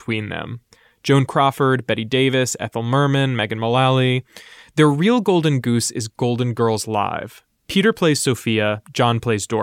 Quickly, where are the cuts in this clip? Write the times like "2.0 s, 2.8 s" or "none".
none